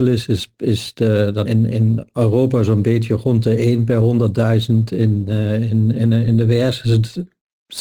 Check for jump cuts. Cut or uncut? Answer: cut